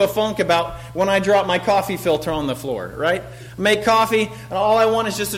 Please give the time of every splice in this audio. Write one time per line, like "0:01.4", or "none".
none